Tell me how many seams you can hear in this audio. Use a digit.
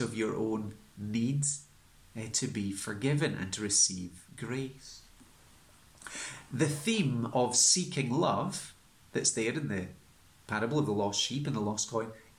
0